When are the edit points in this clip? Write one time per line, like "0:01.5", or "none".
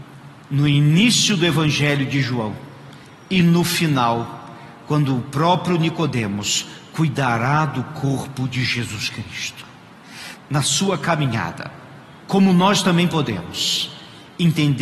0:10.4
0:12.2